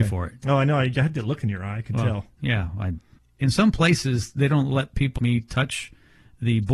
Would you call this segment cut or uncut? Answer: cut